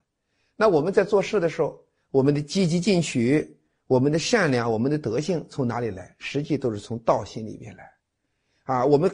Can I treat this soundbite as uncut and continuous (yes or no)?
yes